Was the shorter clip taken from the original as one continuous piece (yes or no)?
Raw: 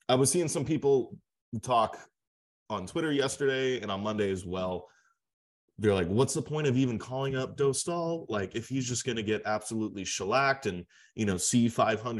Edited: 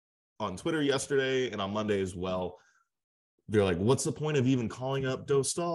yes